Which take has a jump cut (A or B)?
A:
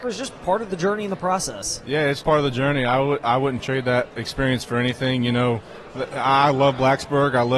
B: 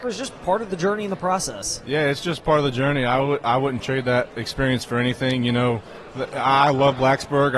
A